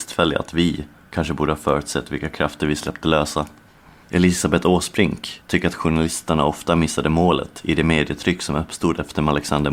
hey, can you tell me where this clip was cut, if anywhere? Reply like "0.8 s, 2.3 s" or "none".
1.1 s